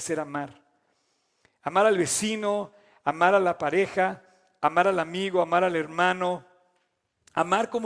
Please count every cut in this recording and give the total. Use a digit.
0